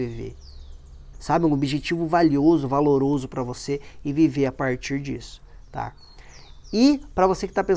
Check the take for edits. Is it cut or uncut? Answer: cut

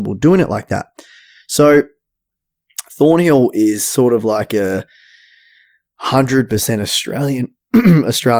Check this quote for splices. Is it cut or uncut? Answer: uncut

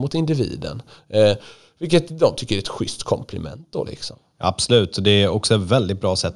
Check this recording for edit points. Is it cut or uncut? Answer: uncut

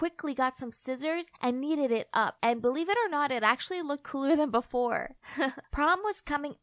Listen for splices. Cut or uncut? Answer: cut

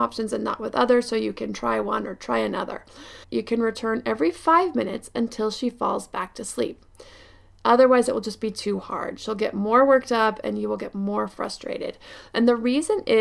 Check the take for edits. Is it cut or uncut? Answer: cut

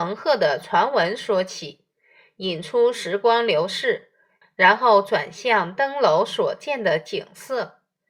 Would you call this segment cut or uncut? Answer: cut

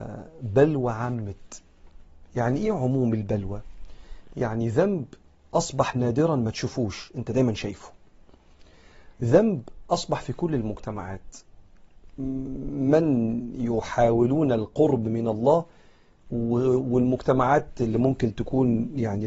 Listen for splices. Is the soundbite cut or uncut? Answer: uncut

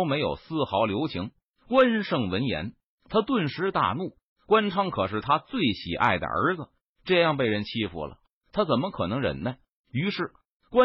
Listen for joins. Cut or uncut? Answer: uncut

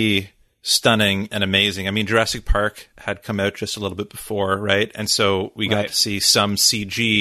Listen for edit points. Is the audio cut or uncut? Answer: uncut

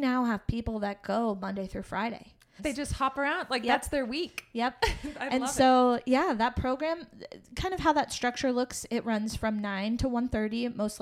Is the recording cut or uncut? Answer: cut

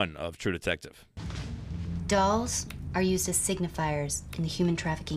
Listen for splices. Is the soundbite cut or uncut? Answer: uncut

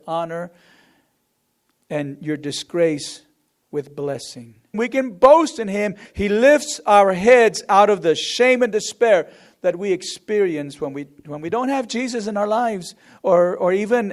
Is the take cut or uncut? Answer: cut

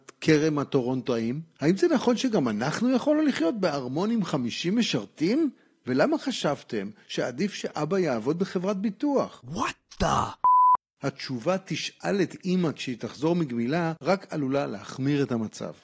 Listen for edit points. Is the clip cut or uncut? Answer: uncut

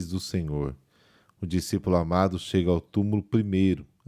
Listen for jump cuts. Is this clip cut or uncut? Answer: uncut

